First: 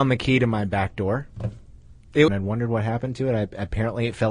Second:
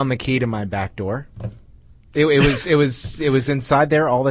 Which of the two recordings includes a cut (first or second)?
first